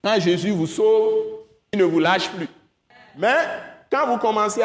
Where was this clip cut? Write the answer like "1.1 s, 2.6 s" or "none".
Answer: none